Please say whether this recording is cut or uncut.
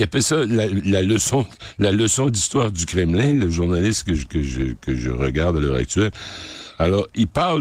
uncut